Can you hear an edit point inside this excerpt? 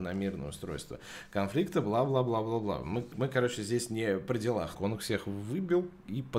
yes; 2 cuts; at 3.1 s, 4.7 s

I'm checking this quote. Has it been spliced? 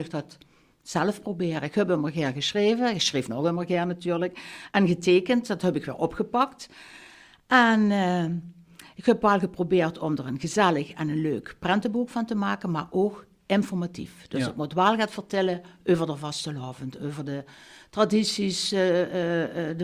no; 0 cuts

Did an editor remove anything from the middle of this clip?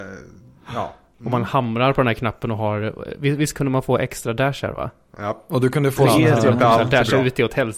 no; 0 cuts

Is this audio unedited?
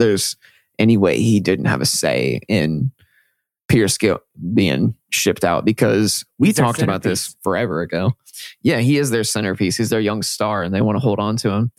yes; 0 cuts

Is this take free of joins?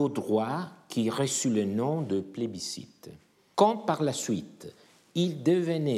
no; 1 cut; at 3.5 s

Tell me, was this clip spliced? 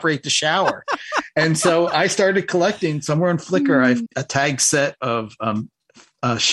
yes; 1 cut; at 4.1 s

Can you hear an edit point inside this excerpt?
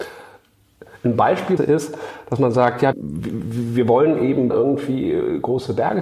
yes; 3 cuts; at 1.6 s, 2.9 s, 4.5 s

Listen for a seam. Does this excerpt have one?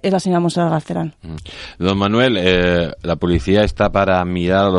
no; 0 cuts

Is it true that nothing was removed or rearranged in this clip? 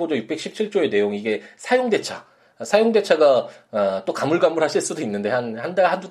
yes; 0 cuts

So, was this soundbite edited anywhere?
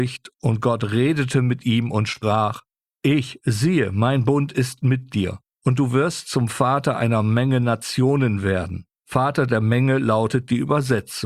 yes; 1 cut; at 8.9 s

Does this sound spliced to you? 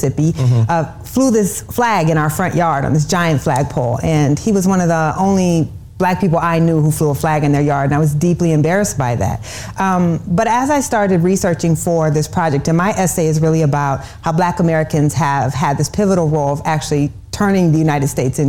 no; 0 cuts

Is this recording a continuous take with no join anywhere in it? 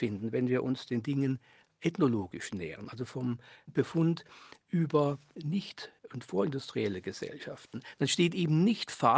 yes; 0 cuts

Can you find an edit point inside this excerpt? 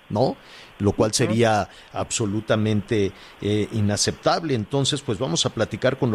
no; 0 cuts

